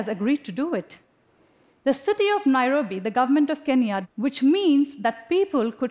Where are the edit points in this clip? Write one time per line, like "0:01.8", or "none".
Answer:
0:04.0